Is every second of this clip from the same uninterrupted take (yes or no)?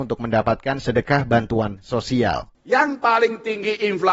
no